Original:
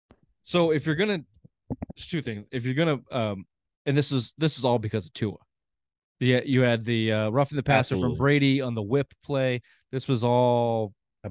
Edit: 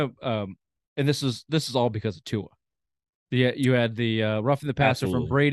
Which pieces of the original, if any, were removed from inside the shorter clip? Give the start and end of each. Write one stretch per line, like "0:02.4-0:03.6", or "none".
none